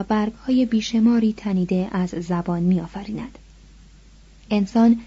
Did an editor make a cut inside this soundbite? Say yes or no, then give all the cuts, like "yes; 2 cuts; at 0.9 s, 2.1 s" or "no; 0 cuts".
no; 0 cuts